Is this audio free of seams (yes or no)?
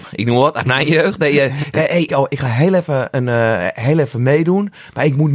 no